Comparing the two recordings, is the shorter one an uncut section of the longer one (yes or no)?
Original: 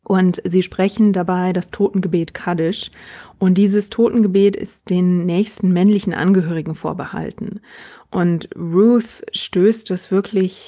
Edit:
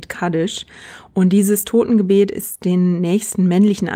yes